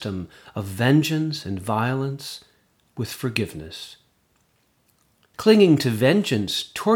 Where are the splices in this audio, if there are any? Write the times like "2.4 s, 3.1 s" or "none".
5.3 s